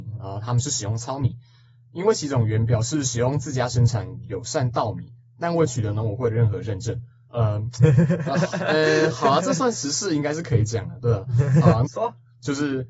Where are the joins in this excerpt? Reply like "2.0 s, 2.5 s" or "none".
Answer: 7.3 s, 11.8 s